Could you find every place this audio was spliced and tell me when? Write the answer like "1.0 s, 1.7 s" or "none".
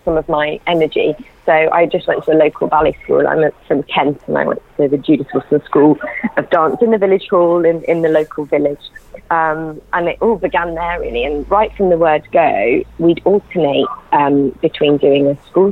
none